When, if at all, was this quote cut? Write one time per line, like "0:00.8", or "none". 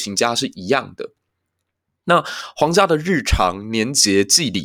none